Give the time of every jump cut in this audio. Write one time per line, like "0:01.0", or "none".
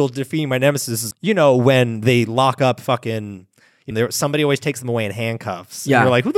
0:01.1
0:03.9